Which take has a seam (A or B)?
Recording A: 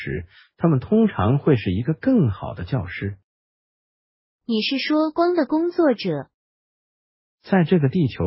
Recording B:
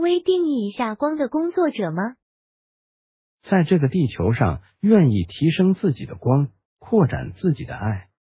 A